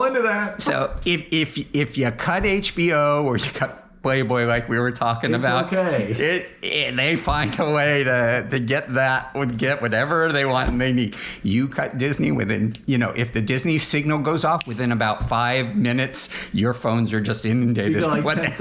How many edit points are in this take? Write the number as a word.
zero